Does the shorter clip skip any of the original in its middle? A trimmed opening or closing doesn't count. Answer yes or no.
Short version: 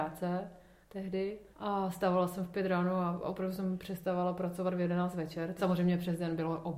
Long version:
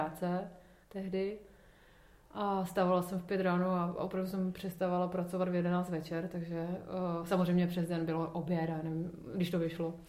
yes